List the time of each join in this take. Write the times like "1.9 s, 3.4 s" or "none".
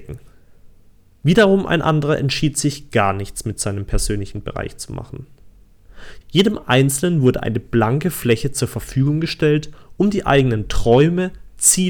6.2 s